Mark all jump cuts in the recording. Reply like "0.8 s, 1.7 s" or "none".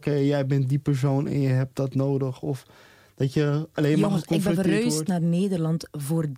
none